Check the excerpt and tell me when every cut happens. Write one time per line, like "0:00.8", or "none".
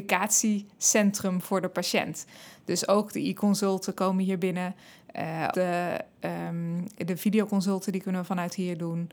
0:05.5